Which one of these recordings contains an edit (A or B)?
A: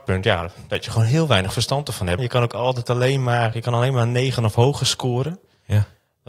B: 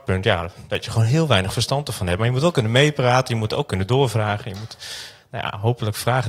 A